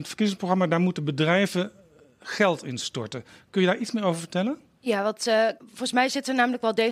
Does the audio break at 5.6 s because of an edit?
yes; 1 cut; at 5.6 s

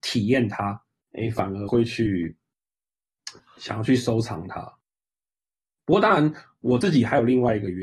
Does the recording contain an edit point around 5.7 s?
no; 1 cut; at 1.1 s

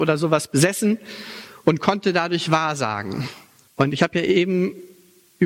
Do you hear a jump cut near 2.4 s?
no; 1 cut; at 3.7 s

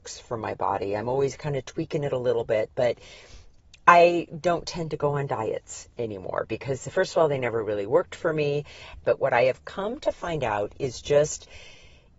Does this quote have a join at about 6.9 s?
no; 1 cut; at 9.0 s

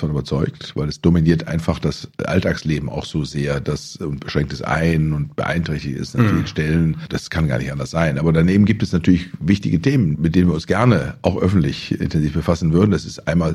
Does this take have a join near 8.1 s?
no; 0 cuts

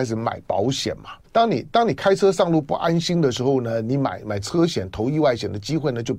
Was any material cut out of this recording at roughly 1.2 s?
yes; 1 cut; at 1.2 s

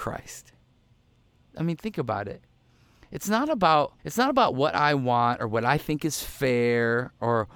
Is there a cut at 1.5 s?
yes; 2 cuts; at 1.5 s, 4.0 s

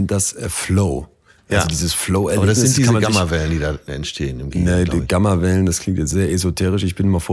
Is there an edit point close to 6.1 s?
yes; 1 cut; at 6.1 s

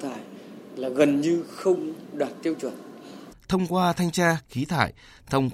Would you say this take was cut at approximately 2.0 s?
no; 2 cuts; at 3.3 s, 4.4 s

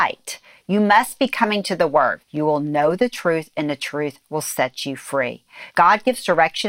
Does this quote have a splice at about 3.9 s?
no; 2 cuts; at 2.2 s, 5.7 s

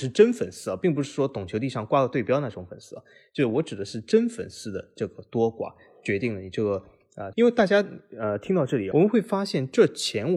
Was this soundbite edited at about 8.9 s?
yes; 2 cuts; at 7.3 s, 8.9 s

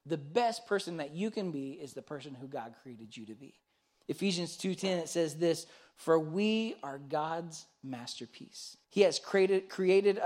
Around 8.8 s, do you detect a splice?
yes; 1 cut; at 8.8 s

